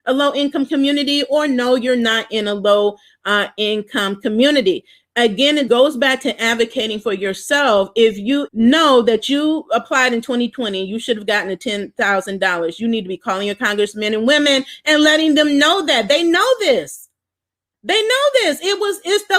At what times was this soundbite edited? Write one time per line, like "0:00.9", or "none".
0:05.7
0:08.5

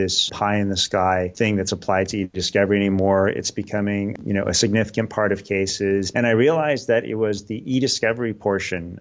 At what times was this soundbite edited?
0:06.1

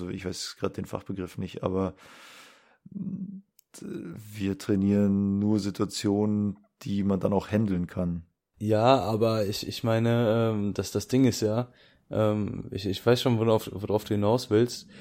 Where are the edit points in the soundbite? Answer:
none

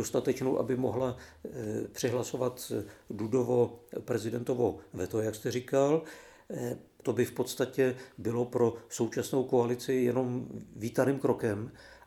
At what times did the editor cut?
0:07.0

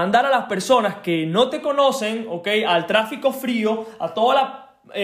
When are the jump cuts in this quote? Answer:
none

